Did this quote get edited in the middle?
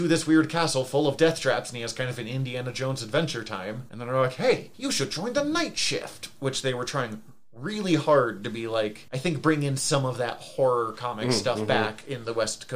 no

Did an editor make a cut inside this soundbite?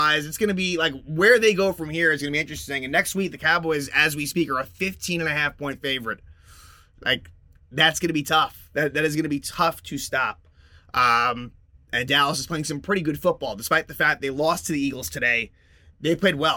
no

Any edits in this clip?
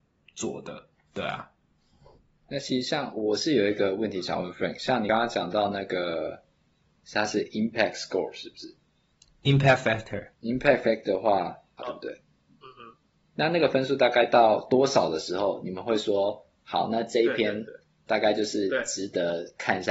yes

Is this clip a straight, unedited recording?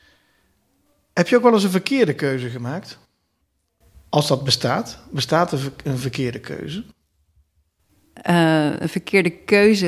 yes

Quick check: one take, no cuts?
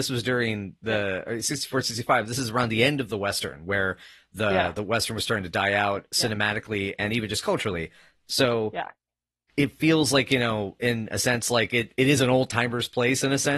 yes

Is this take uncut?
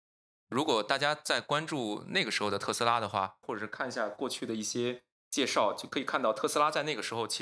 no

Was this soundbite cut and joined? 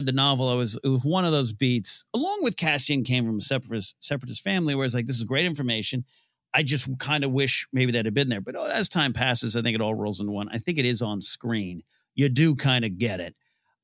no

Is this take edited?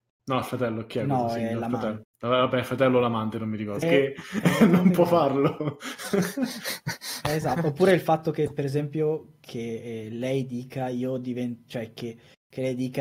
yes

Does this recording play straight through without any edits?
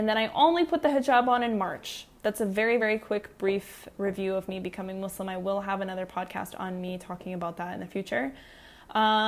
yes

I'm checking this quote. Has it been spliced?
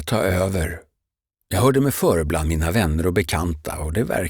yes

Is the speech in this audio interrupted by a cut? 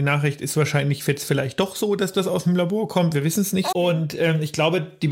yes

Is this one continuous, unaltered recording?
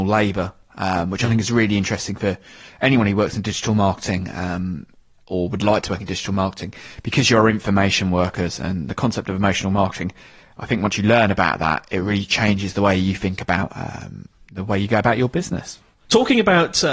yes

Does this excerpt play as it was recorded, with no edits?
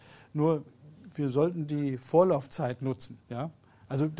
no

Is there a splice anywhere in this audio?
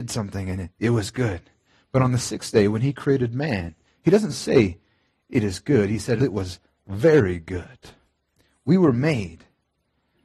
yes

